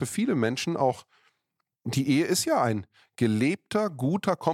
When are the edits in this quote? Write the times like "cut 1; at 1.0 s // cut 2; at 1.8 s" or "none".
cut 1; at 1.7 s